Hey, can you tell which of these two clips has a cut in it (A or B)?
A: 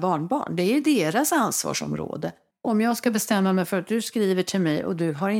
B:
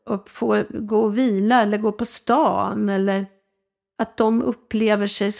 A